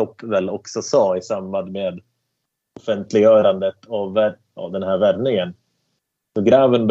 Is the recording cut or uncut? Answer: cut